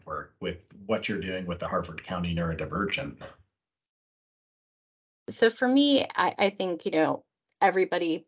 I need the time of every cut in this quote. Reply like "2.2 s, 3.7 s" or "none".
none